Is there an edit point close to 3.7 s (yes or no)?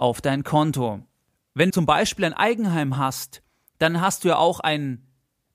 no